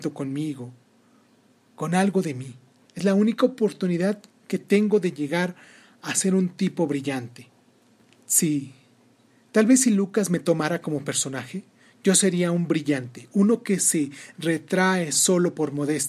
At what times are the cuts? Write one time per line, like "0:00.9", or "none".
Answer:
none